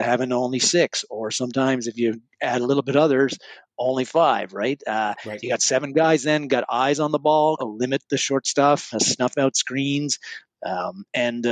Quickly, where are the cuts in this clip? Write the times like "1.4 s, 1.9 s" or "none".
7.6 s, 8.9 s